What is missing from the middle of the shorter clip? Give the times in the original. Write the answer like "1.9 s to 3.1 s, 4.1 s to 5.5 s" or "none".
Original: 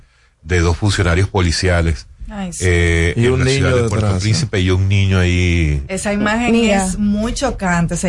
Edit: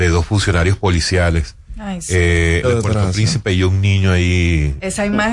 3.1 s to 3.7 s